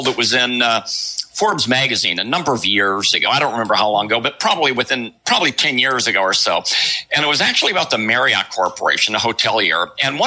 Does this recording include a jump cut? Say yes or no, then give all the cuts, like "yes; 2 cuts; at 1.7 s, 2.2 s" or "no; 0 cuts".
no; 0 cuts